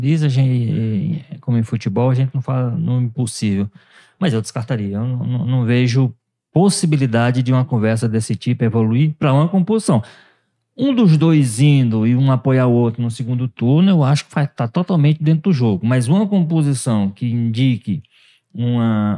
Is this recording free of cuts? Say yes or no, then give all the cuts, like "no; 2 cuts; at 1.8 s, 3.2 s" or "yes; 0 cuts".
yes; 0 cuts